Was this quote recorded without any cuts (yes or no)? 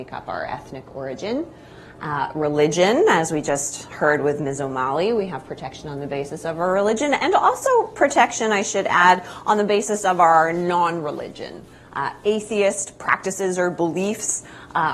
yes